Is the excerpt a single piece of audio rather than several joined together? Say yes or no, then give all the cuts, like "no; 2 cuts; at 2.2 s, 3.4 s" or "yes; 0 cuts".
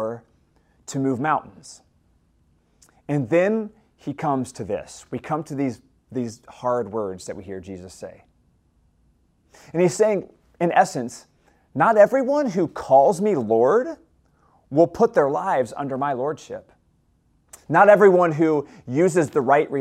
yes; 0 cuts